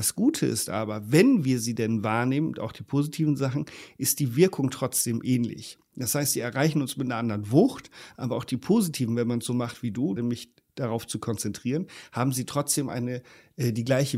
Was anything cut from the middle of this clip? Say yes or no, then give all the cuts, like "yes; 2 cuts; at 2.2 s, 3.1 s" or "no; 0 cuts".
yes; 1 cut; at 10.2 s